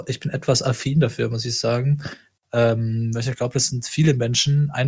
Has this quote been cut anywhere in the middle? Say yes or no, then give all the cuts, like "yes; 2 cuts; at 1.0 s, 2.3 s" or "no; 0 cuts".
yes; 1 cut; at 2.4 s